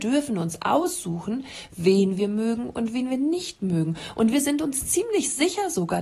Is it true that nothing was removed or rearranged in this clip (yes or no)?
yes